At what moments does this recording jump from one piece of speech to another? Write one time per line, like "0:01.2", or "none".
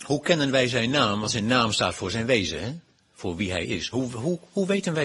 none